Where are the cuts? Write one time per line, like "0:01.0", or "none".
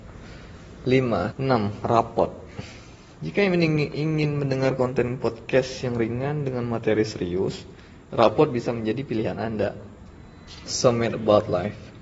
0:01.3
0:08.1
0:10.7